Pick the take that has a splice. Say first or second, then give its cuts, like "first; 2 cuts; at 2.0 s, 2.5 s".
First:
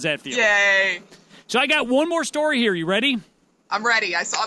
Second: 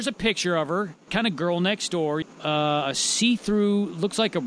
second; 2 cuts; at 1.1 s, 2.2 s